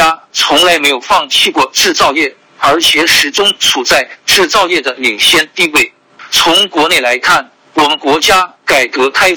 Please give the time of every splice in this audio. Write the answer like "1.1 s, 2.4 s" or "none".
none